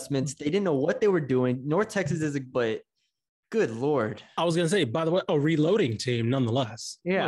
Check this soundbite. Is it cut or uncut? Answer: cut